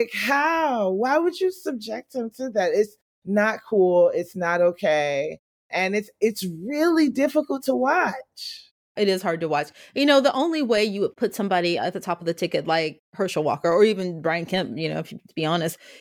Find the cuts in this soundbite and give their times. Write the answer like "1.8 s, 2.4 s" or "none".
none